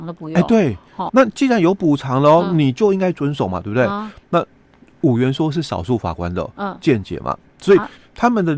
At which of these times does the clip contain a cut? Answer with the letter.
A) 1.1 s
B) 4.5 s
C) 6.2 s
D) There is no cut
A